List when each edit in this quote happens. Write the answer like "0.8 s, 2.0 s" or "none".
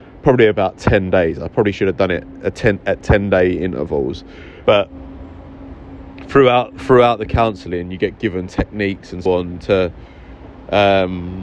4.6 s, 9.3 s